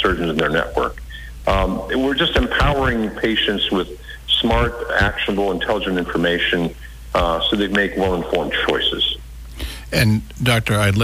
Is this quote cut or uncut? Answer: uncut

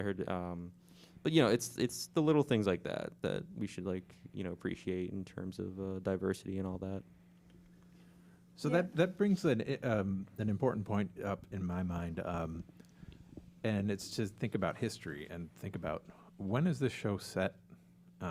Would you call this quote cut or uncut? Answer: uncut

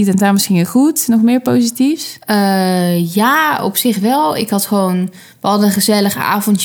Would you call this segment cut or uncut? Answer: uncut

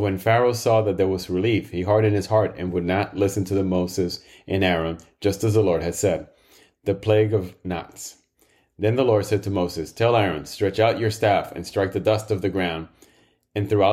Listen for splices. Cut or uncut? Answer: uncut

